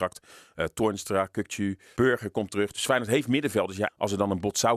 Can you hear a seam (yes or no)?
yes